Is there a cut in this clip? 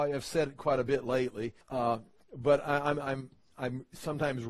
yes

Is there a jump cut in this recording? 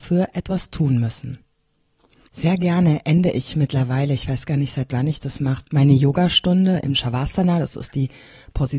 yes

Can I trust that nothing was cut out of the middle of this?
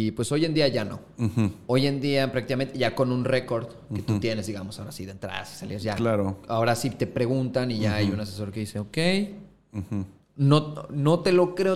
yes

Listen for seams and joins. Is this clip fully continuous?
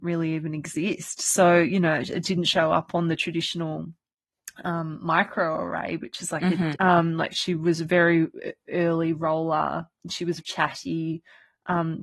no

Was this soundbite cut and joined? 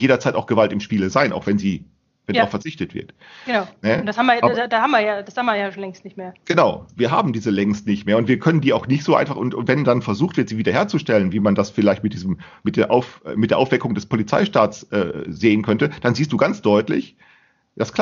no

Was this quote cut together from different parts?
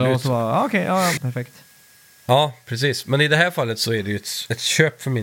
yes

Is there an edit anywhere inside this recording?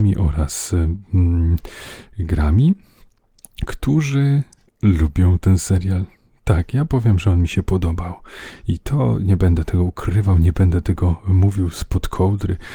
no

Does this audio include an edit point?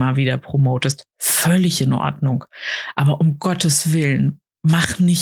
yes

